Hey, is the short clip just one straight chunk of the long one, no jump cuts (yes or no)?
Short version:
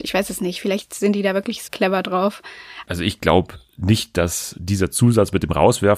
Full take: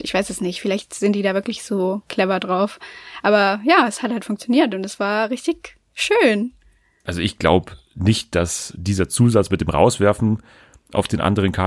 no